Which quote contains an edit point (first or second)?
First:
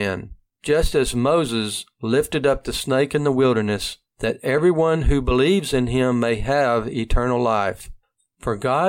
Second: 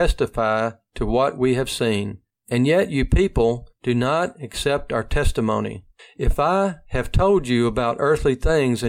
first